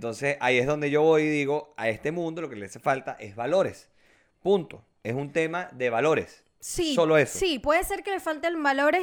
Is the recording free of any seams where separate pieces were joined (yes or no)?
yes